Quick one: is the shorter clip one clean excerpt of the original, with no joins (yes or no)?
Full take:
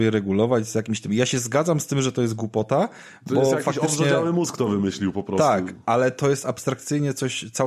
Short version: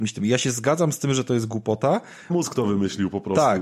no